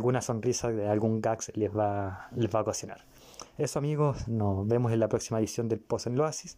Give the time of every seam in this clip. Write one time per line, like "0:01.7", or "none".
none